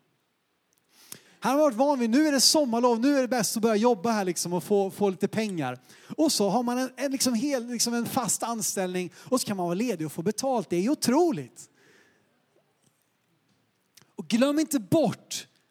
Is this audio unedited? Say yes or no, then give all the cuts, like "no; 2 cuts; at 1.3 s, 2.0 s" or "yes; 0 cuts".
no; 1 cut; at 1.3 s